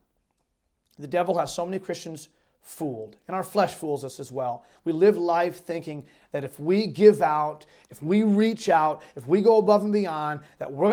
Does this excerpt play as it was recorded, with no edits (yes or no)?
yes